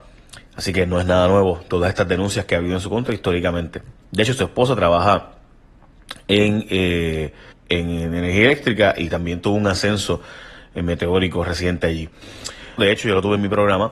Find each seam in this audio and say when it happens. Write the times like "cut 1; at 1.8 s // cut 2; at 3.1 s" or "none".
cut 1; at 7.5 s // cut 2; at 12.8 s